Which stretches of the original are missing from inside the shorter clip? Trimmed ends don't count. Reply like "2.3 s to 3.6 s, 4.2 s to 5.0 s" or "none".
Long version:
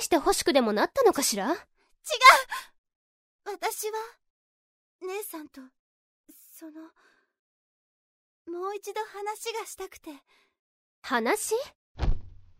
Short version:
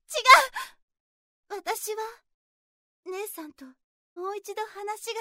6.1 s to 8.5 s